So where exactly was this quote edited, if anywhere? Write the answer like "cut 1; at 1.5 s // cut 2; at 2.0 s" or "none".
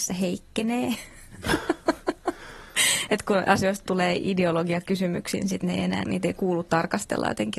cut 1; at 6.0 s